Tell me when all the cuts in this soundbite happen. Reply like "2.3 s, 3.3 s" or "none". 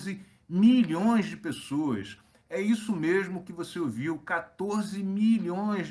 none